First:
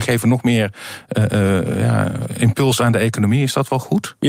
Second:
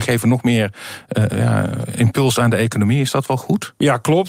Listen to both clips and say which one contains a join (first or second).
second